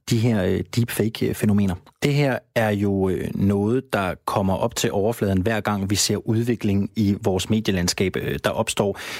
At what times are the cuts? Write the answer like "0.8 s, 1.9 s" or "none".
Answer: 1.9 s